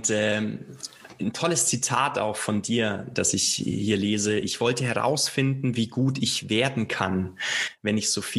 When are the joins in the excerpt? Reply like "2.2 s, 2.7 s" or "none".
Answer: none